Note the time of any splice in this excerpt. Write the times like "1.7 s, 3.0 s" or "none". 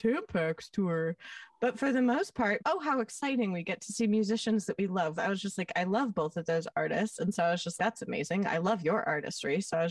2.6 s, 5.2 s, 7.8 s